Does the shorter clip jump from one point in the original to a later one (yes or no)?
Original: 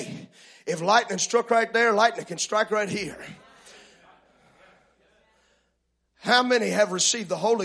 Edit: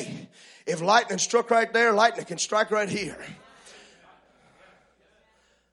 no